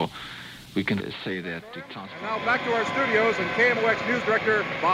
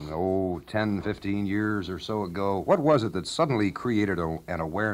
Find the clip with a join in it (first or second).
first